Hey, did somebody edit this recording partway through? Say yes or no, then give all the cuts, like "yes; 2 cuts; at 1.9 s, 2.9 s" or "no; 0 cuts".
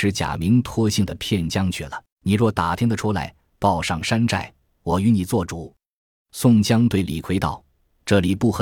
yes; 1 cut; at 2.1 s